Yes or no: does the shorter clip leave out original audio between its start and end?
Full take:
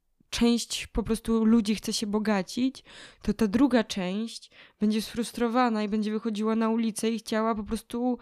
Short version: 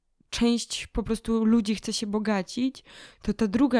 no